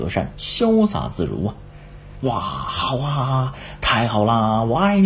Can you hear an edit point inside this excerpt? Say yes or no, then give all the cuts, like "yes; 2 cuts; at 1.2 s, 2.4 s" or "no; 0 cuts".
yes; 1 cut; at 2.2 s